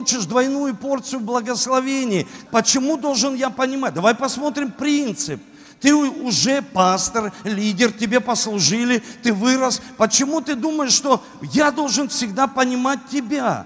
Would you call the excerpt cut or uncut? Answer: cut